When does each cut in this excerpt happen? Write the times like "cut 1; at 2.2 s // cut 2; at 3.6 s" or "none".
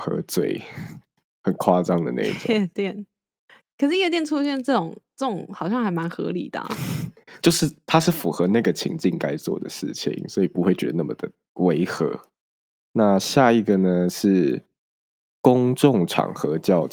none